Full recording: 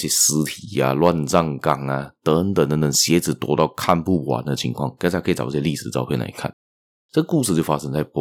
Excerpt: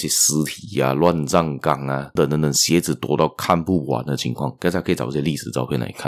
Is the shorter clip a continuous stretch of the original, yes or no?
no